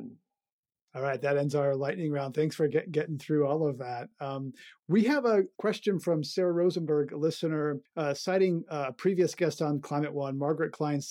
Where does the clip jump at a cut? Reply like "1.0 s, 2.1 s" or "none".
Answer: none